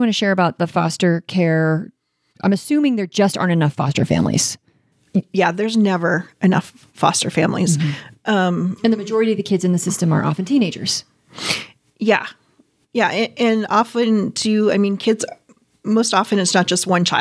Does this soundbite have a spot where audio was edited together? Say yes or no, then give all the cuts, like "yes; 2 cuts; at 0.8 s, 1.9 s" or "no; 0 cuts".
no; 0 cuts